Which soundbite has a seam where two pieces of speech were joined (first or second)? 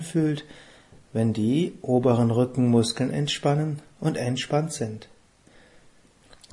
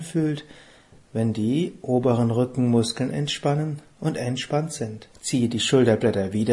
second